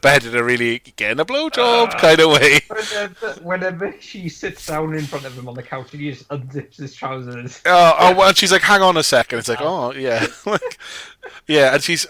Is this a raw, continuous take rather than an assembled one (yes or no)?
yes